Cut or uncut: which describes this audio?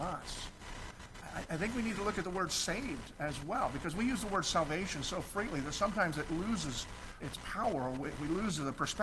cut